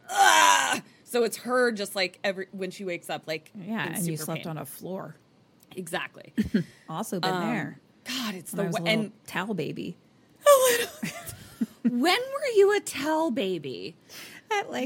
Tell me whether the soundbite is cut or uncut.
uncut